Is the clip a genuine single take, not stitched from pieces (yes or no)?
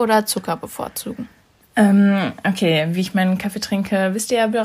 yes